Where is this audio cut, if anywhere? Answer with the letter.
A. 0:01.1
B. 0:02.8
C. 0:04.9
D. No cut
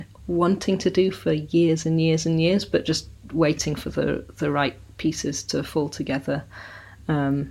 D